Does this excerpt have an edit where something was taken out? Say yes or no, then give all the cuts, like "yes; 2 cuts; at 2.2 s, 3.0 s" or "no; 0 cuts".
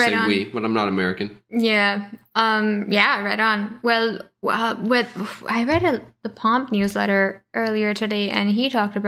no; 0 cuts